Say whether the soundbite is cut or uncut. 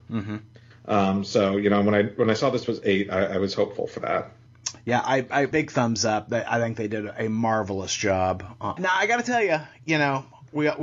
cut